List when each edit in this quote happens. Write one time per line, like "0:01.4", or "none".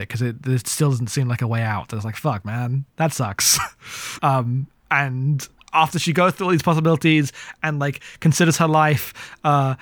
0:04.2